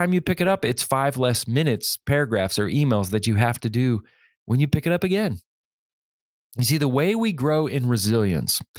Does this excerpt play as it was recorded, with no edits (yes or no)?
no